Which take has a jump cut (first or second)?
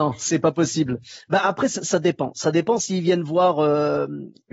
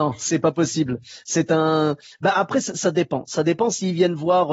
first